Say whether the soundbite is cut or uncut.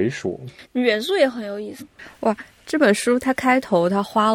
cut